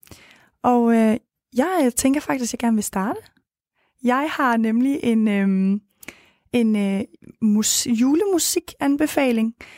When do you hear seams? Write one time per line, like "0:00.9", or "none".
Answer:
none